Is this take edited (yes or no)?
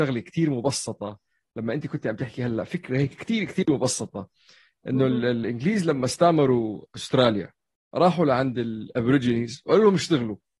no